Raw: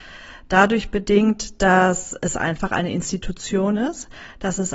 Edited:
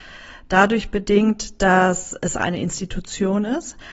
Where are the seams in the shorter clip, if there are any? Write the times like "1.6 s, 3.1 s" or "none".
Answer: 2.4 s